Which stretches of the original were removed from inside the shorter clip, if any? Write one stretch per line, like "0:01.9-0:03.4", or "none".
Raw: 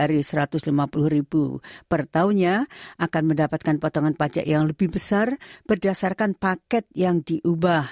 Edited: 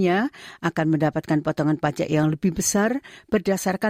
none